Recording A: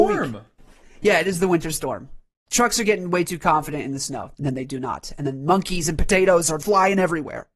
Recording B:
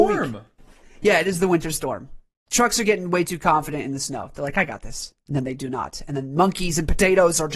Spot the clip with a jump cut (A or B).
A